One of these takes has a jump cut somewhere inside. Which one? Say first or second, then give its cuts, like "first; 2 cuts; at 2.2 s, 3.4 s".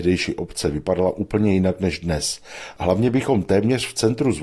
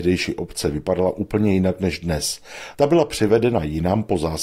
second; 1 cut; at 2.7 s